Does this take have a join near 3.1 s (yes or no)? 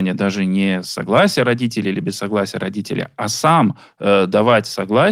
no